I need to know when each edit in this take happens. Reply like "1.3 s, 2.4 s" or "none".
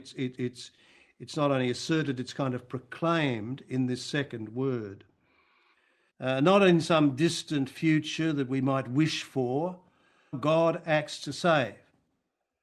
6.1 s, 10.3 s